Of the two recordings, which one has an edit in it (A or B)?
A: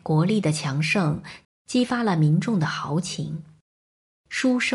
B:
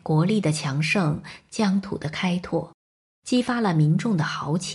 A